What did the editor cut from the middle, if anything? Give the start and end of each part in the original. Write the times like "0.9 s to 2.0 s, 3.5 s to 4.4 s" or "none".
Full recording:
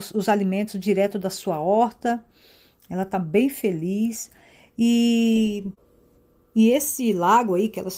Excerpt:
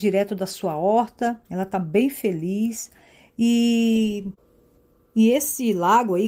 2.3 s to 2.8 s